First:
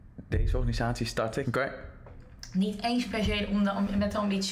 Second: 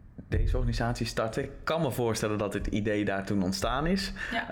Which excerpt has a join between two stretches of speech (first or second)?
first